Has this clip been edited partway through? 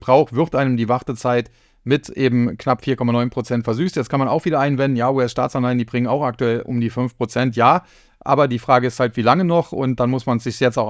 no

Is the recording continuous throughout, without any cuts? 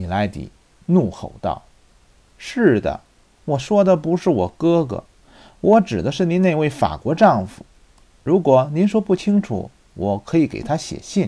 no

